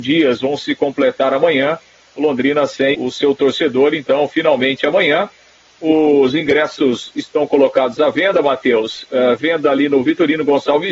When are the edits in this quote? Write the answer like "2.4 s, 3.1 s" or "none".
2.9 s